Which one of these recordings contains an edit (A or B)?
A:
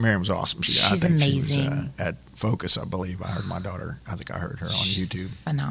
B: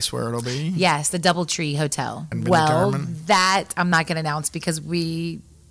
B